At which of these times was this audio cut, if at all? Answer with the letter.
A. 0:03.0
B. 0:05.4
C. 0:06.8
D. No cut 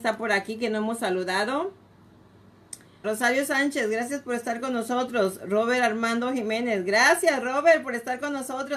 A